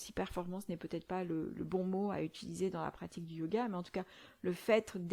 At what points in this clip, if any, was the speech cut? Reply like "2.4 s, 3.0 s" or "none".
1.5 s